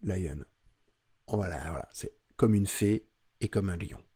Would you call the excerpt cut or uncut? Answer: uncut